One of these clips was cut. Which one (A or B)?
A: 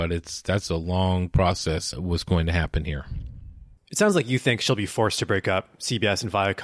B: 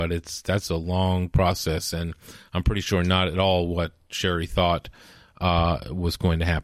A